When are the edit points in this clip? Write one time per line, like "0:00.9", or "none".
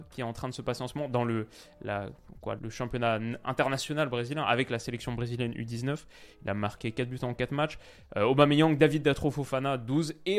0:02.6